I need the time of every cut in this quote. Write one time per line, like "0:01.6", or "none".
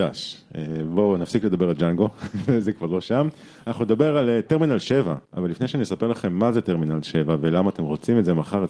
0:05.3

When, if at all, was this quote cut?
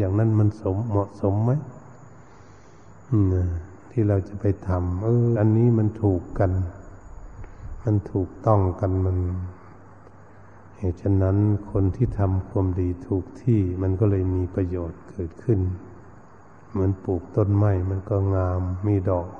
0:05.4

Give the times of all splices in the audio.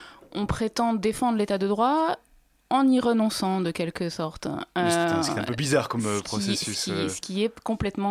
none

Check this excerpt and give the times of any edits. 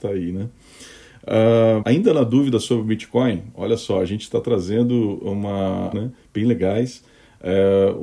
0:01.8
0:05.9

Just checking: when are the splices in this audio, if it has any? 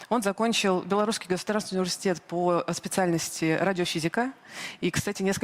none

